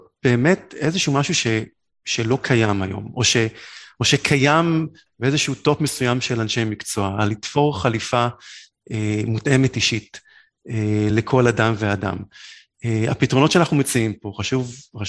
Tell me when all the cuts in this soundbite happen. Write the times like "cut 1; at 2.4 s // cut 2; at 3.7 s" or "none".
none